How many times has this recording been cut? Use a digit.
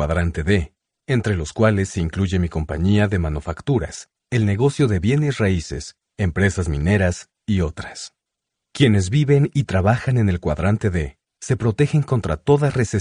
0